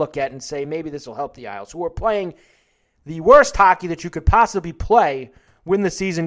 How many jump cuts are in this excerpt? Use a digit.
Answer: 0